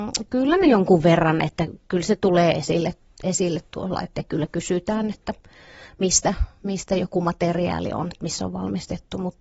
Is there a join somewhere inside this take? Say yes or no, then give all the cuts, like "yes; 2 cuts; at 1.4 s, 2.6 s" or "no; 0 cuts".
no; 0 cuts